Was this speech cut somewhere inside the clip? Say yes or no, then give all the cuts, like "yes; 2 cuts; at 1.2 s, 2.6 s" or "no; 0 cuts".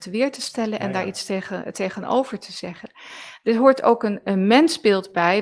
yes; 1 cut; at 4.2 s